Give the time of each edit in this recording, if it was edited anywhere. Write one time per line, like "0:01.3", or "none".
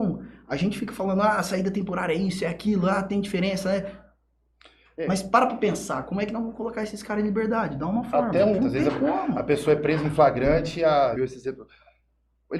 0:08.6
0:11.2